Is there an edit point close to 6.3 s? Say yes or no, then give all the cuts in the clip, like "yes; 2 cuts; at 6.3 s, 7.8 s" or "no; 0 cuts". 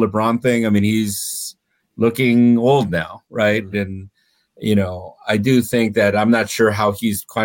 no; 1 cut; at 3.7 s